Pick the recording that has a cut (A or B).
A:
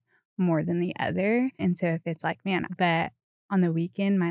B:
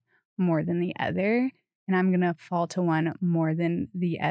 A